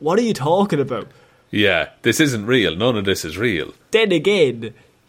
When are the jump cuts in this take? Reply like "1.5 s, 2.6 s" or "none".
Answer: 3.8 s

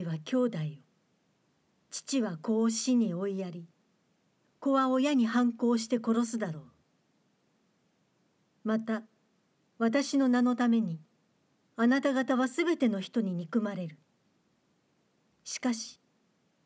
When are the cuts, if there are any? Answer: none

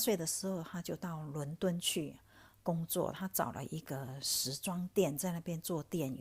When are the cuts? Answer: none

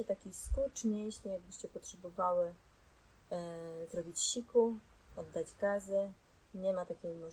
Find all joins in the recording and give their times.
none

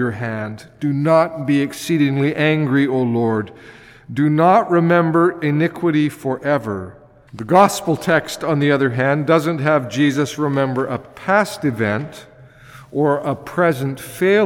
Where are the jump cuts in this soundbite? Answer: 7.3 s

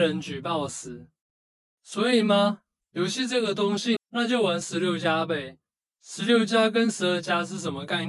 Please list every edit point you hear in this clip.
4.0 s

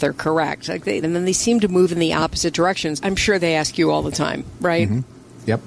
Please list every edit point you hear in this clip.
1.0 s, 3.0 s

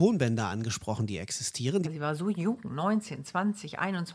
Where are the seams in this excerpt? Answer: 1.8 s

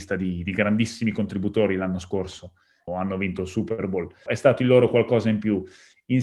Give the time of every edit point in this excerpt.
2.9 s, 4.3 s

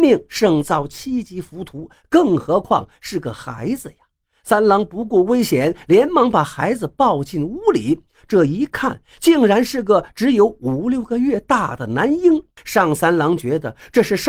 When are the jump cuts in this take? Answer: 12.6 s

